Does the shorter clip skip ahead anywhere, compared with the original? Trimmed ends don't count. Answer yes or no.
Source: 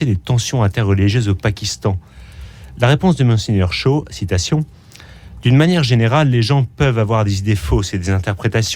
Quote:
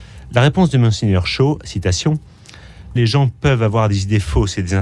yes